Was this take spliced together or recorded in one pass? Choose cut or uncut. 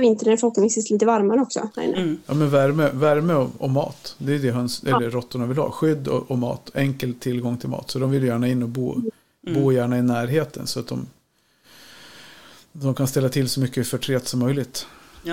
uncut